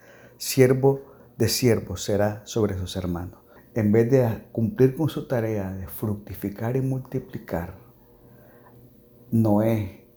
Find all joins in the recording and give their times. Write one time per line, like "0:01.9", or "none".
0:03.6

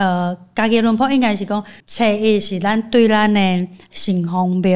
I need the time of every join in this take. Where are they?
0:01.8

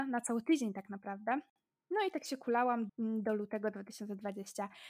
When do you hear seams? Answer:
0:02.9

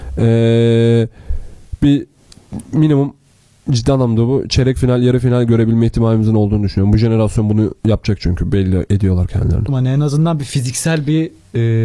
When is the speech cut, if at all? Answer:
0:09.7

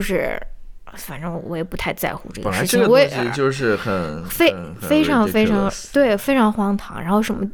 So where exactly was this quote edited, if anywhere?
none

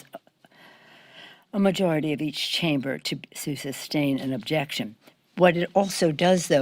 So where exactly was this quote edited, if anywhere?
none

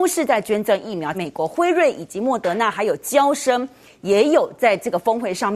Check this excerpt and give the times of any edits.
0:01.1

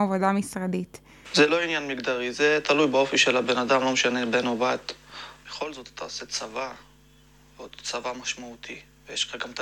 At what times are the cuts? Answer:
0:01.2
0:05.4

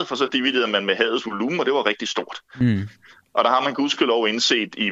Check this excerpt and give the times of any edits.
none

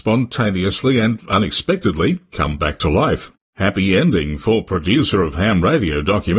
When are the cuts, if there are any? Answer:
0:03.4

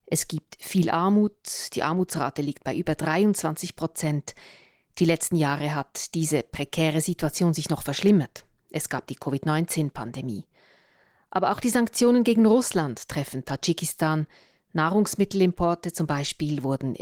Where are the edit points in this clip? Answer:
none

